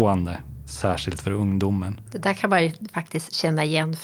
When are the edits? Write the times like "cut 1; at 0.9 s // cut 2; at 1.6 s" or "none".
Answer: cut 1; at 2.1 s